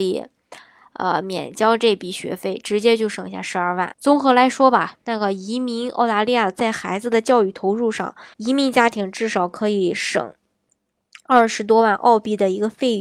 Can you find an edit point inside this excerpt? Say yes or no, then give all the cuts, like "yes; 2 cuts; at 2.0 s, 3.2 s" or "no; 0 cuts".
yes; 2 cuts; at 3.9 s, 8.3 s